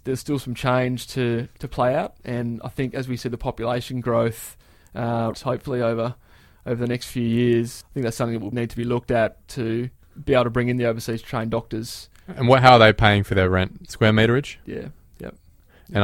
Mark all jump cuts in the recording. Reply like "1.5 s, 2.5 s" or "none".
5.3 s, 8.5 s, 14.6 s